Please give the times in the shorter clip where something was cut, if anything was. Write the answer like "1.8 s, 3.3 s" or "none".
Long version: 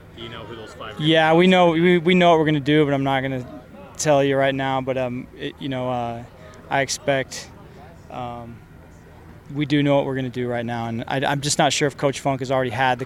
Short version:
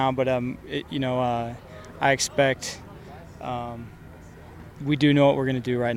none